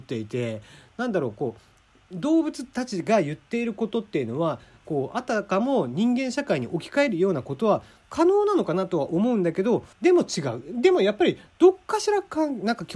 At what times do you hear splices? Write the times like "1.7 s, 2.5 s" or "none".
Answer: 9.9 s